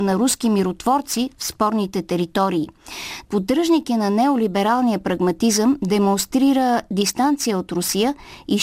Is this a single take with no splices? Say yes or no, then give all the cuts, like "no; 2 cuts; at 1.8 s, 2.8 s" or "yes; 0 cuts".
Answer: no; 1 cut; at 3.2 s